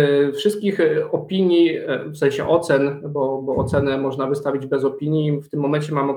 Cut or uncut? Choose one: uncut